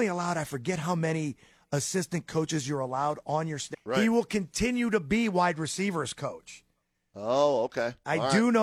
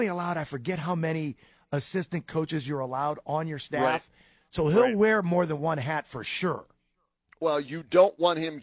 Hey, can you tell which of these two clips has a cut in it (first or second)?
first